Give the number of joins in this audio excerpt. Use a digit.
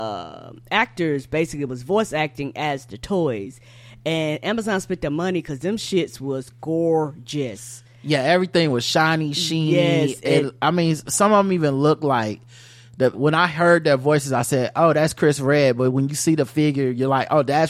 2